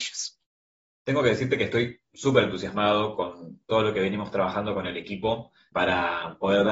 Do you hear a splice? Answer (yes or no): yes